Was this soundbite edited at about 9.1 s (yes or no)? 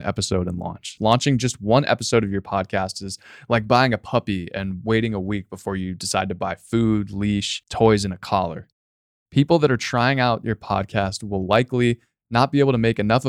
no